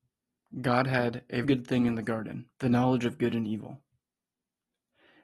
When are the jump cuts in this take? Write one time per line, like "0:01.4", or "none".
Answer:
0:01.4
0:02.5